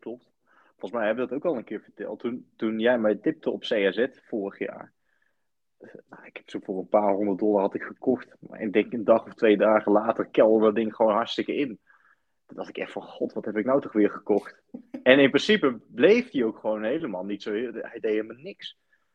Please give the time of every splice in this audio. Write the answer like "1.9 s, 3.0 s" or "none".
2.6 s